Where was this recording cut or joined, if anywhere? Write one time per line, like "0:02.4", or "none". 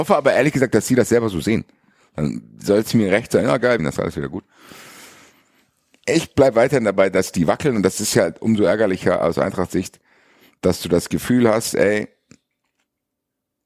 0:03.8

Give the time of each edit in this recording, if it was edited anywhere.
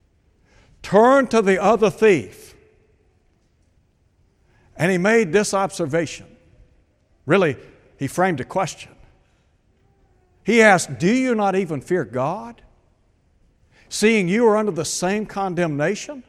none

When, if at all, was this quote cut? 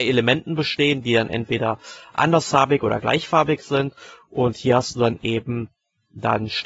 none

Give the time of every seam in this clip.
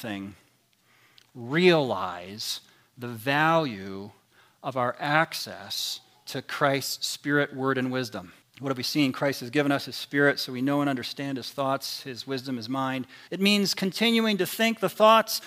0:08.4
0:13.3

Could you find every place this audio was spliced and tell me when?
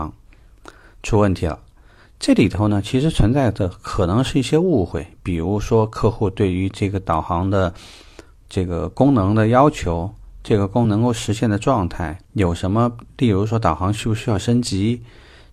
0:10.8
0:12.2

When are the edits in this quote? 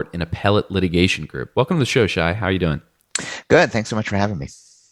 none

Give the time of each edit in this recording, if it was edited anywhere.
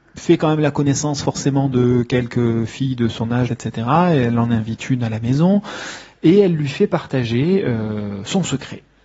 0:03.5

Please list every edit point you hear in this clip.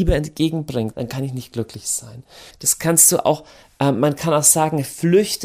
0:00.9
0:02.5

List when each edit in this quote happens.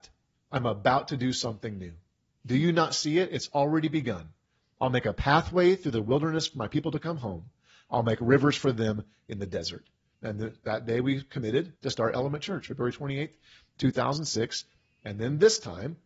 0:10.1
0:11.8

